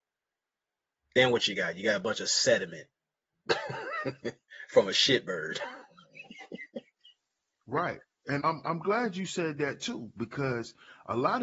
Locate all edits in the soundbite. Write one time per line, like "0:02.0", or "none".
0:08.4